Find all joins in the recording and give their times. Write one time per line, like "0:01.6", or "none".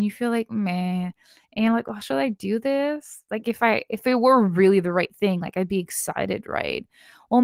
none